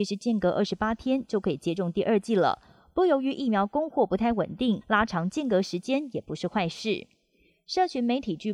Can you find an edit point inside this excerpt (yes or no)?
no